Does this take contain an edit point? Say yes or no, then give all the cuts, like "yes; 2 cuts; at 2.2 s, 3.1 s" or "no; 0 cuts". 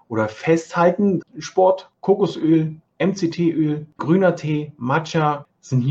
yes; 2 cuts; at 1.2 s, 4.0 s